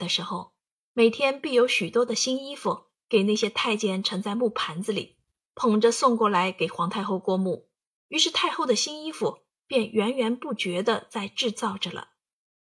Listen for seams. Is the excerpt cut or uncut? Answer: cut